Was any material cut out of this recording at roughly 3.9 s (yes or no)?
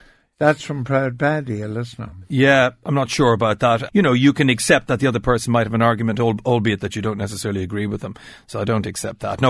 yes